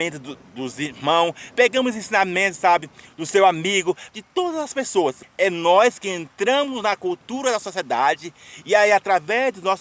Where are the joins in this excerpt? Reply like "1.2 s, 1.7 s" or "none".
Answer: 4.1 s, 5.2 s